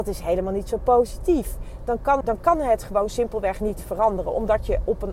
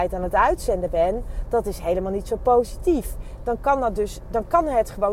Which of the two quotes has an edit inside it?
first; 1 cut; at 2.2 s

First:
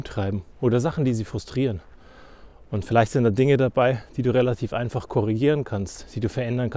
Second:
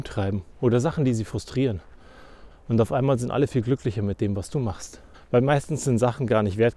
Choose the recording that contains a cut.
second; 2 cuts; at 2.5 s, 5.1 s

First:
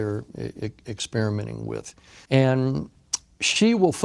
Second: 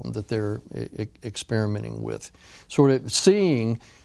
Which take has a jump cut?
first; 1 cut; at 2.2 s

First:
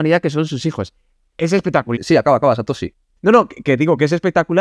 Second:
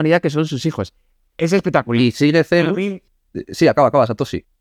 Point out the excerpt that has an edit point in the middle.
first; 1 cut; at 1.9 s

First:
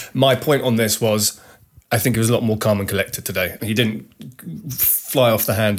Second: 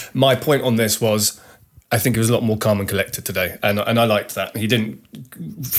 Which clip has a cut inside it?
first; 1 cut; at 3.6 s

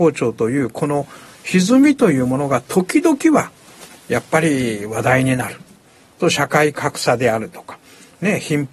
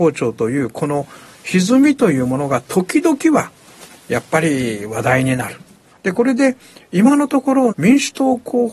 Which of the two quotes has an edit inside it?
second; 2 cuts; at 5.9 s, 7.7 s

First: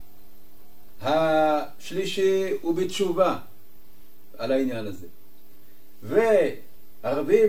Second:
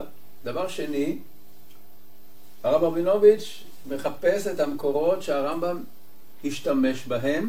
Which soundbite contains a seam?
first; 1 cut; at 1.0 s

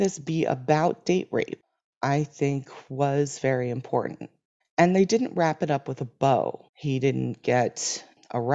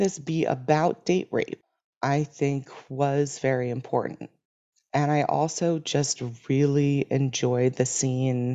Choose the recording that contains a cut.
first; 2 cuts; at 4.6 s, 6.7 s

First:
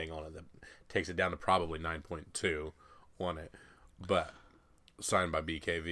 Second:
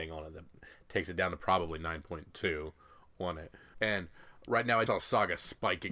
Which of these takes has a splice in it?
second; 2 cuts; at 3.7 s, 4.9 s

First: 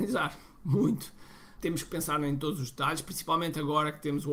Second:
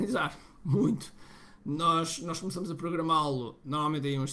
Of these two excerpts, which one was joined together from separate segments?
first; 1 cut; at 1.6 s

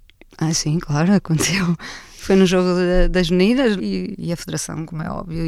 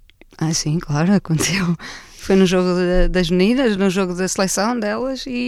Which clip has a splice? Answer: first; 1 cut; at 3.8 s

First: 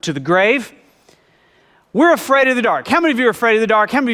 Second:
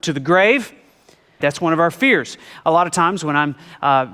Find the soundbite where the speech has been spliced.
second; 2 cuts; at 1.4 s, 2.6 s

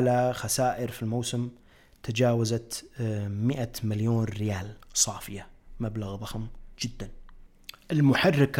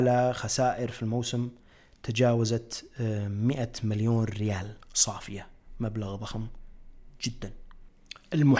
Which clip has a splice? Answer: first; 1 cut; at 6.7 s

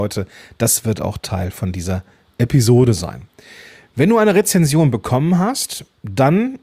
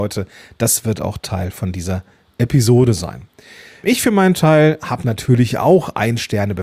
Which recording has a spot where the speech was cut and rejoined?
second; 1 cut; at 3.8 s

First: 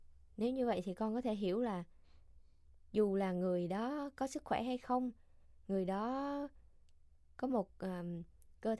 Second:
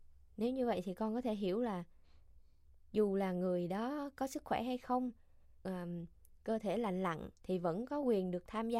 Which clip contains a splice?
second; 2 cuts; at 5.6 s, 7.3 s

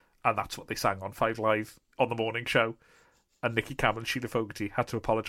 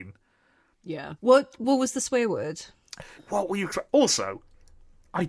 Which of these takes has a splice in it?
second; 2 cuts; at 1.2 s, 3.2 s

